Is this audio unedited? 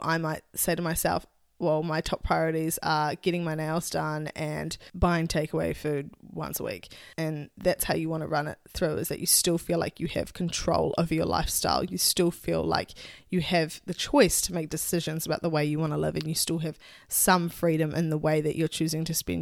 no; 1 cut; at 7.1 s

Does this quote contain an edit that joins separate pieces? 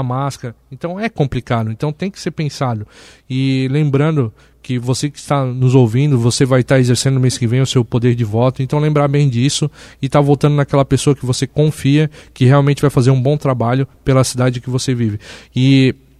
no; 0 cuts

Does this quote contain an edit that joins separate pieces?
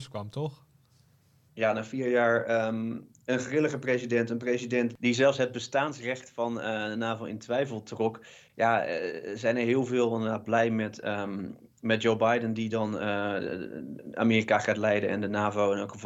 no; 0 cuts

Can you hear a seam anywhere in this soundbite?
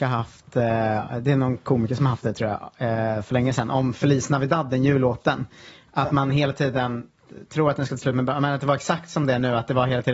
no; 0 cuts

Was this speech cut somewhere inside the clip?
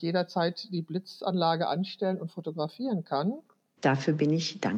yes; 1 cut; at 3.8 s

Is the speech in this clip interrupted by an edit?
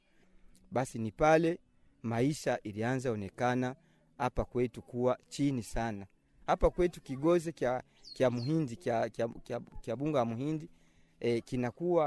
no; 0 cuts

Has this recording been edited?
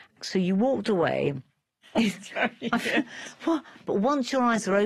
yes; 1 cut; at 1.8 s

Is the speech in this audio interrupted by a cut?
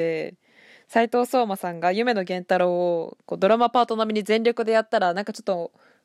no; 0 cuts

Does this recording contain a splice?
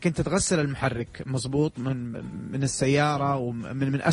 no; 0 cuts

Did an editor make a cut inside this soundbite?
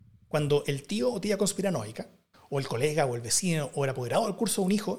yes; 1 cut; at 2.3 s

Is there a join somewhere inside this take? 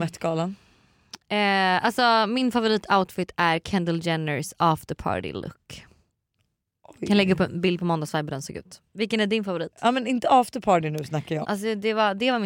yes; 1 cut; at 11.4 s

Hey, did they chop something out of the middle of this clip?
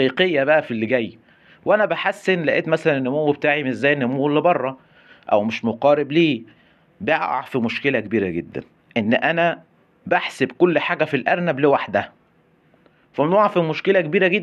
no; 0 cuts

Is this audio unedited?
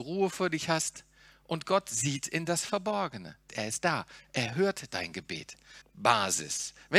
no; 2 cuts; at 3.5 s, 5.8 s

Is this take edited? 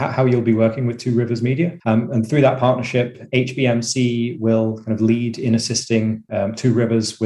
yes; 1 cut; at 1.8 s

